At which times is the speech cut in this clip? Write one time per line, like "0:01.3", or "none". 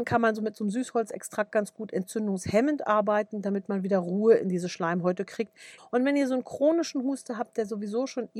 0:05.8